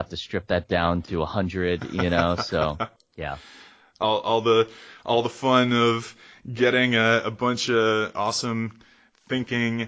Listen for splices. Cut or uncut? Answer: cut